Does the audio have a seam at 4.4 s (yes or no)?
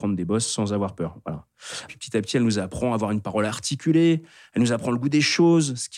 no